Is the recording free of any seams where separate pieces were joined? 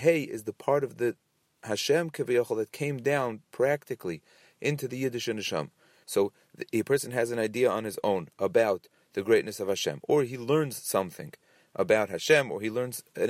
no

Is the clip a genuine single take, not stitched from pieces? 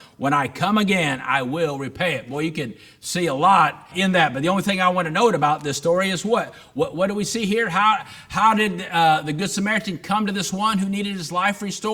no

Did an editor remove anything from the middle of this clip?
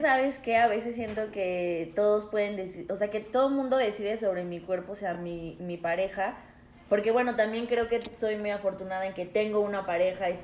no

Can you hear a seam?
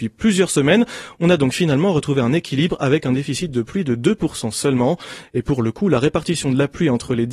no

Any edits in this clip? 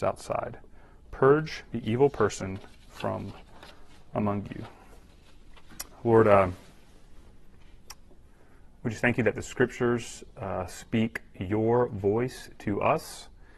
yes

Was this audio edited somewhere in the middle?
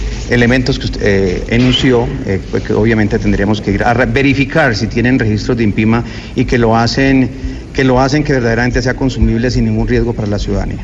yes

